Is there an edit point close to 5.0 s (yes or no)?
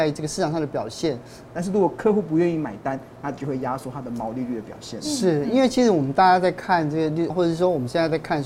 no